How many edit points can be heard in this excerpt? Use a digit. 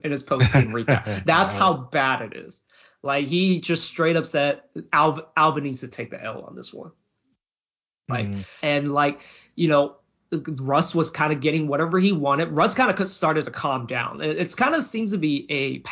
1